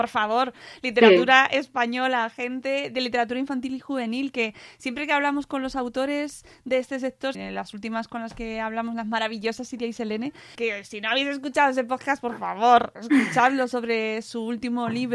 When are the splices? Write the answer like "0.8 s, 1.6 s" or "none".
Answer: 7.3 s, 10.5 s